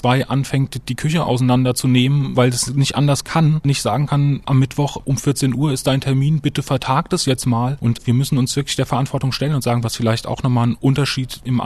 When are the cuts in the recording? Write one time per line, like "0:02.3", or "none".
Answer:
0:07.8
0:09.8